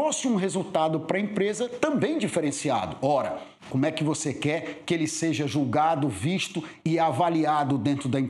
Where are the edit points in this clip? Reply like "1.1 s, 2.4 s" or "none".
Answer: 3.6 s